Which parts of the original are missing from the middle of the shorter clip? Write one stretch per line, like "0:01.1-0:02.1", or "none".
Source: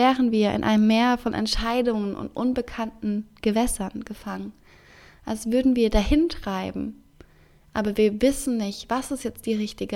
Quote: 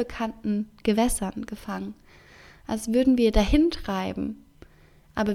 none